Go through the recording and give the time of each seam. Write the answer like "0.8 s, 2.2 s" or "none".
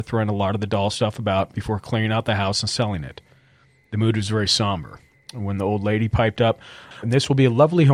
7.0 s